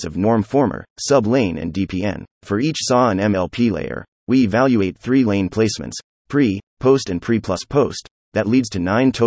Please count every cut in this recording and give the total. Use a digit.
1